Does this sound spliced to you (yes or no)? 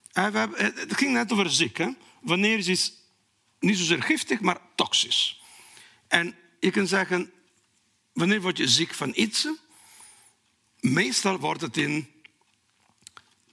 no